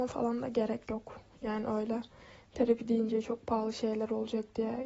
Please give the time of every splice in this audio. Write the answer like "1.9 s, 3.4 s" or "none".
none